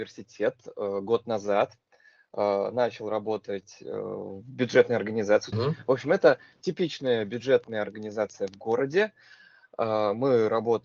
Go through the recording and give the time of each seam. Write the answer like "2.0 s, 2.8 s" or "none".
5.5 s